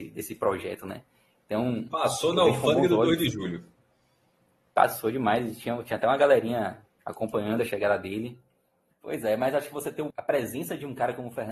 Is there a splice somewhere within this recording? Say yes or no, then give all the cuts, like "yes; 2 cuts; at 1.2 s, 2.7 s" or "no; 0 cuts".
yes; 2 cuts; at 8.9 s, 10.1 s